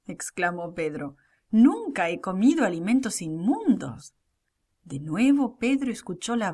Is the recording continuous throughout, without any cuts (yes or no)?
yes